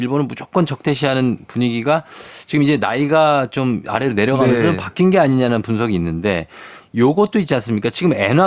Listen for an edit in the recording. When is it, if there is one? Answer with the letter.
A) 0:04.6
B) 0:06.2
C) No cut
C